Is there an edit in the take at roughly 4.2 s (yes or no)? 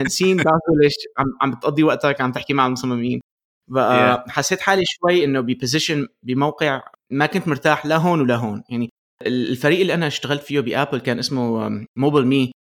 no